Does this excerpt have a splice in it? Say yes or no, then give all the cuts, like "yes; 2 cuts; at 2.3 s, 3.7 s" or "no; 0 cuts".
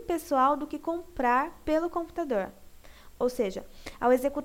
yes; 1 cut; at 3.1 s